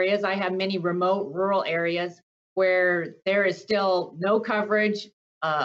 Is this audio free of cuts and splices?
yes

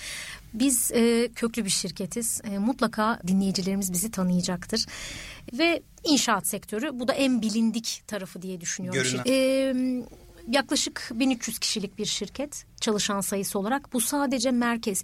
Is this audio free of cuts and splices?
no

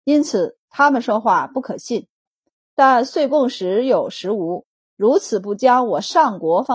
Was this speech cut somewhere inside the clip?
yes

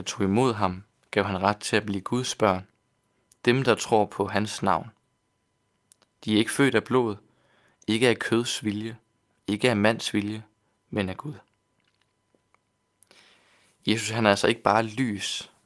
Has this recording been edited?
no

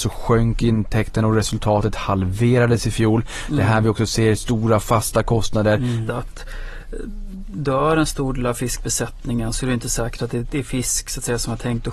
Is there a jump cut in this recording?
yes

